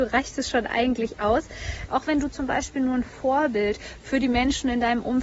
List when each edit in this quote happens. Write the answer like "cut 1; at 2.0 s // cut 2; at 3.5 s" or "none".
cut 1; at 1.9 s